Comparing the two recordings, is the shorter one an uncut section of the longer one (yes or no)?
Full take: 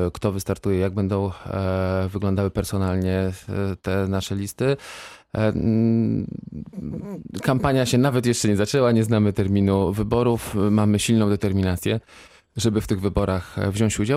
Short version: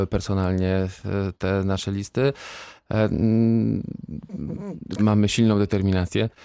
no